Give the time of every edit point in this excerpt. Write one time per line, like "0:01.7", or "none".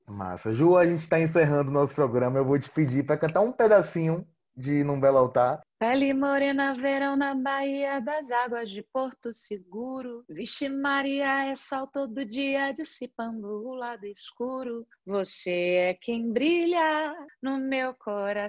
none